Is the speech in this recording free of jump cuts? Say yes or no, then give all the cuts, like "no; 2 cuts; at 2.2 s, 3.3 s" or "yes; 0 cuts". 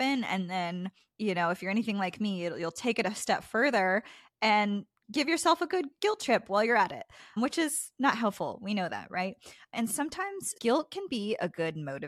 yes; 0 cuts